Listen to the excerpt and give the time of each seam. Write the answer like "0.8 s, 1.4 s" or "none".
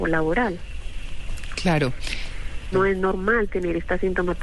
2.7 s